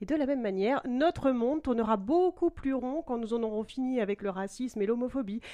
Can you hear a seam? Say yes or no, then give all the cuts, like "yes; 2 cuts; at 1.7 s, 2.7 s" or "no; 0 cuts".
no; 0 cuts